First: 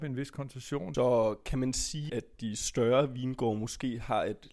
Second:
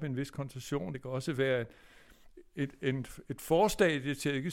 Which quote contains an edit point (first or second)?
first